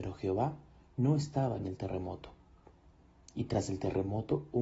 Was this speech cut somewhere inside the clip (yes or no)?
no